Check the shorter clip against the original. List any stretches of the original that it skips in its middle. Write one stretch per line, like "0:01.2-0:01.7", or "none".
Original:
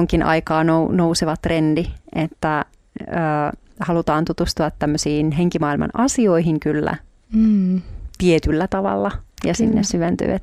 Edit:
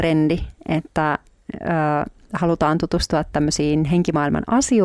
none